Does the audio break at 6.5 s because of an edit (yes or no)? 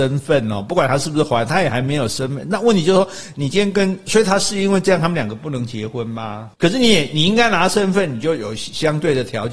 yes